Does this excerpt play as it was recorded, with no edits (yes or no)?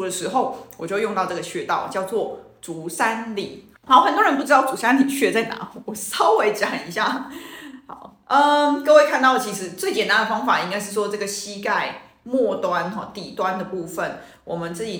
no